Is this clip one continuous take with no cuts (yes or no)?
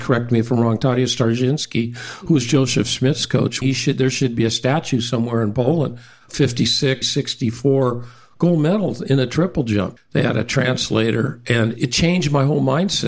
no